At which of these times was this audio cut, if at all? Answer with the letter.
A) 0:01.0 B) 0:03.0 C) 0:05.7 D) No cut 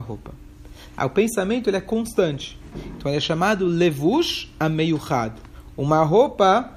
A